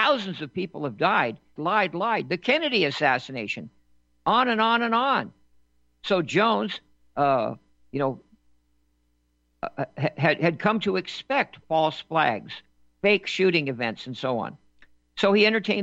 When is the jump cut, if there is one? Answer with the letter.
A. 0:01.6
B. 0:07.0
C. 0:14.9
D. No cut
A